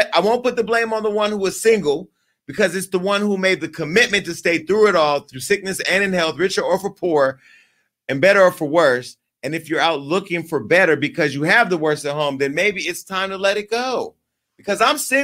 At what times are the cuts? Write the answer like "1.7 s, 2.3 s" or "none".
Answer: none

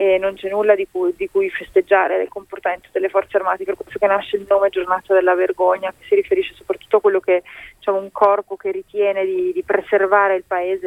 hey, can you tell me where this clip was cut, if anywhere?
3.7 s

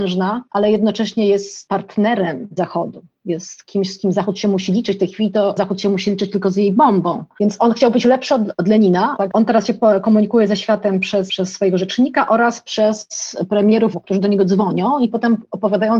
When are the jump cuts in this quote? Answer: 7.4 s, 9.2 s, 13.9 s

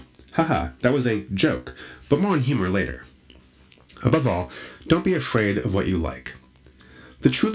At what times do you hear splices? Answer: none

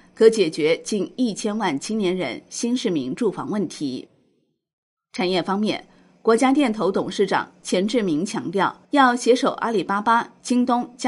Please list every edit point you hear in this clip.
8.8 s

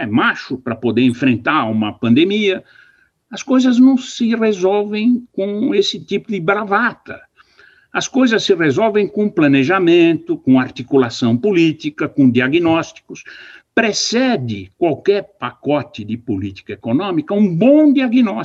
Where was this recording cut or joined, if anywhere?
none

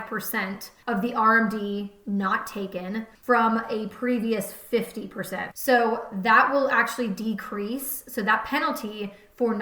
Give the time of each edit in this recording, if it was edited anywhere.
5.5 s

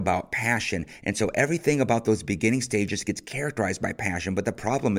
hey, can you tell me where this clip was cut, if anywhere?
none

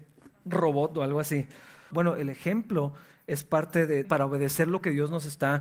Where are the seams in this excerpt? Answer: 1.9 s, 4.0 s

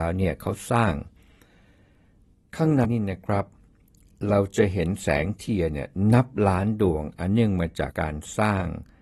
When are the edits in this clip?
2.8 s, 7.9 s

